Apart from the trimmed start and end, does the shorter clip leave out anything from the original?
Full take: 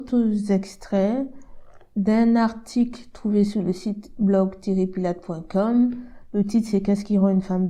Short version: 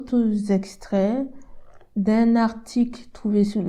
no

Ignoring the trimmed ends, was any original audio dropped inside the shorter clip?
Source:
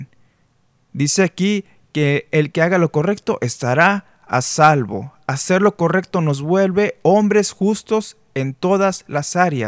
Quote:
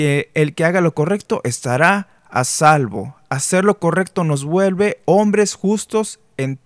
no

